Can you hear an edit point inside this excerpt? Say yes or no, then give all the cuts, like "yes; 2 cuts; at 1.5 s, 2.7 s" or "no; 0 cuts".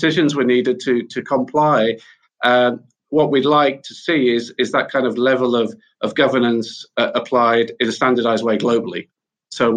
no; 0 cuts